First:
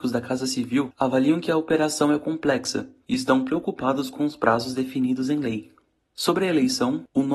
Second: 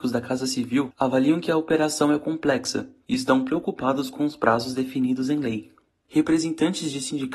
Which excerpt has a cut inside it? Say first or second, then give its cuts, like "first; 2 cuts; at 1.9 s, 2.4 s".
second; 1 cut; at 5.9 s